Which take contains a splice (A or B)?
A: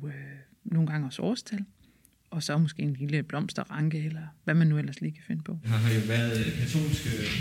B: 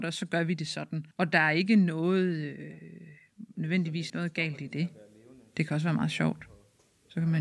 B